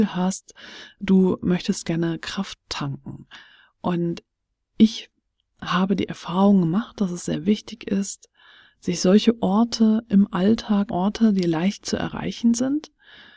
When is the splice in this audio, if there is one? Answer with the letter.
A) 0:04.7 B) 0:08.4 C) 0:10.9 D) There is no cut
C